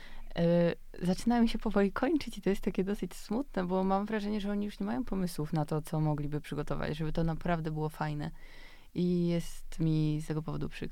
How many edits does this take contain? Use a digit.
0